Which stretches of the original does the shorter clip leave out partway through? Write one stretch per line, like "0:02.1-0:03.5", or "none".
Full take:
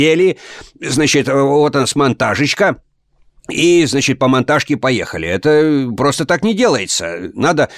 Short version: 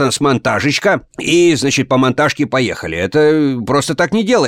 0:02.9-0:03.4